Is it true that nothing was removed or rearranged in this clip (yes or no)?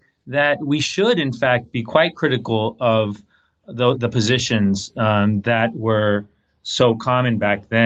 yes